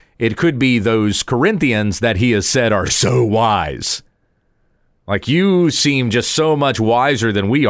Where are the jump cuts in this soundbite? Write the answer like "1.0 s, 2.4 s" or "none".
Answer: none